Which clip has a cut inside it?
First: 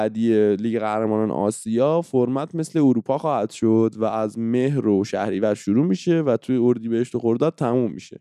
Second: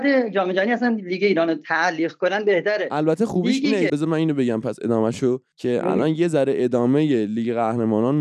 second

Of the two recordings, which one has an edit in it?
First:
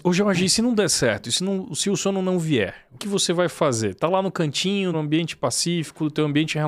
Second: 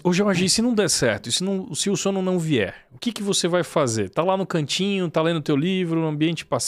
first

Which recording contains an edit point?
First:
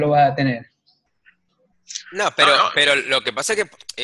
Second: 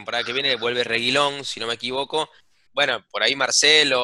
second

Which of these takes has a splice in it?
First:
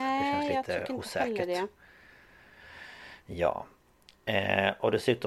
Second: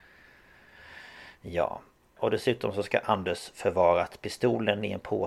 second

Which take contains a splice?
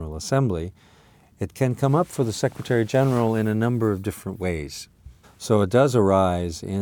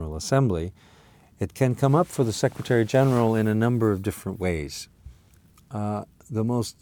first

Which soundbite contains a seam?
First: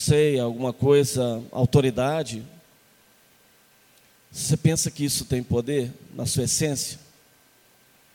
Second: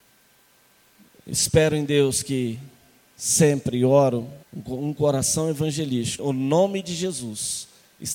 second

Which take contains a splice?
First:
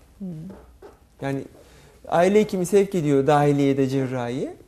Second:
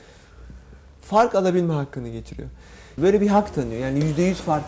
second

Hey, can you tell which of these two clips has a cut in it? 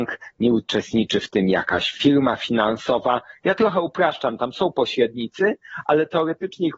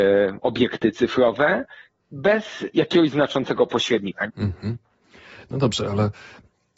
second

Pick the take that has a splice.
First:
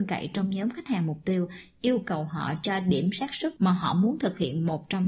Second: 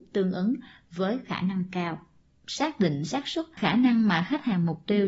second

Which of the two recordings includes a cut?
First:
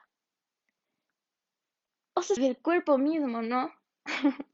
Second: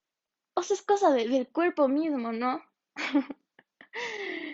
first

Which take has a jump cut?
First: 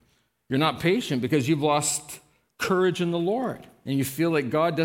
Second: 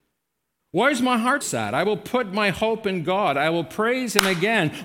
second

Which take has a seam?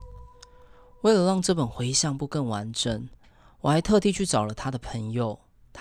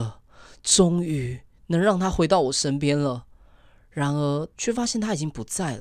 second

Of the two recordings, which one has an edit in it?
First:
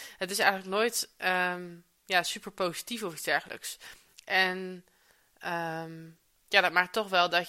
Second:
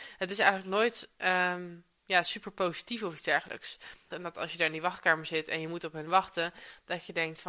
second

